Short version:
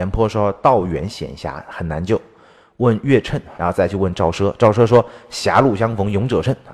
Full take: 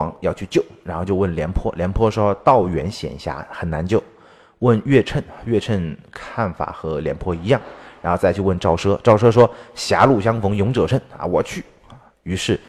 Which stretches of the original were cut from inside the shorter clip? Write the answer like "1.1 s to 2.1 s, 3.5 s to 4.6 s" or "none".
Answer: 5.4 s to 8.0 s